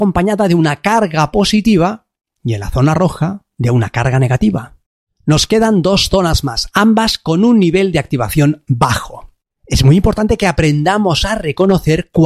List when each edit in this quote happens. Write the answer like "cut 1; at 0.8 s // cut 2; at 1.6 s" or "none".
cut 1; at 6.7 s // cut 2; at 9.4 s